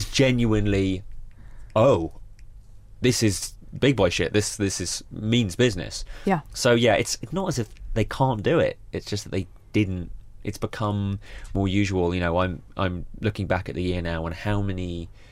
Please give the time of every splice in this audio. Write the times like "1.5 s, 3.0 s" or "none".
none